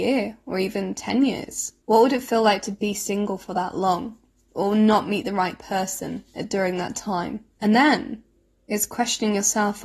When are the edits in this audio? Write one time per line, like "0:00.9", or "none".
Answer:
0:01.8
0:07.6